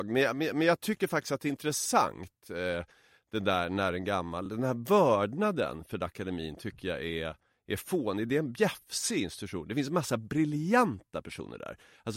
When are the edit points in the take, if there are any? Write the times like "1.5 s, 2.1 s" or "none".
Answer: none